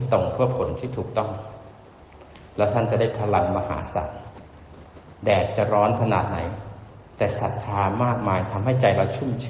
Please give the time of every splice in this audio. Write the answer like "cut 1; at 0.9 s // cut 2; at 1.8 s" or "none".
none